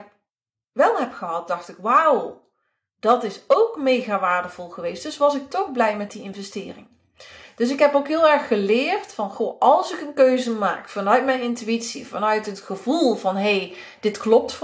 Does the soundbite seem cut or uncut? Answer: uncut